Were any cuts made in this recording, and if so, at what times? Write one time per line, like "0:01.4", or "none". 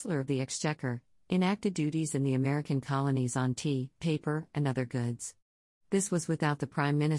none

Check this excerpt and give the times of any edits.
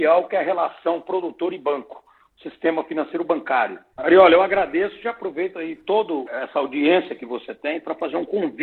0:03.9

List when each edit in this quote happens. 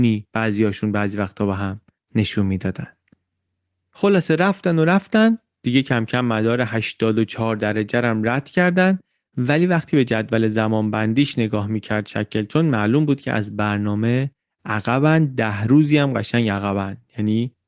none

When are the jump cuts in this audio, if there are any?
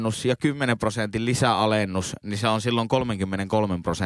none

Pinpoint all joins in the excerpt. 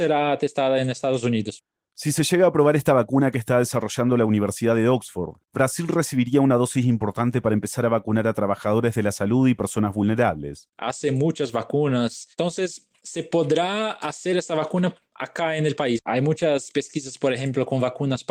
0:10.7
0:16.0

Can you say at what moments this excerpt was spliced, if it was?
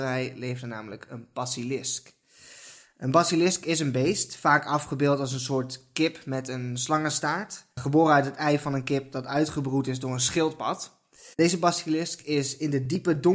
0:07.7
0:11.3

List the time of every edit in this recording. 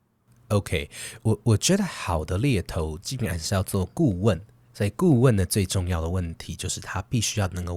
none

